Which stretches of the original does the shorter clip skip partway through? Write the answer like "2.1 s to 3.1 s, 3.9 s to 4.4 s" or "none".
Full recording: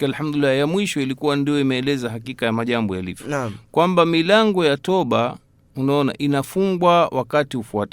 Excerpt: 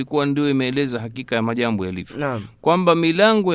none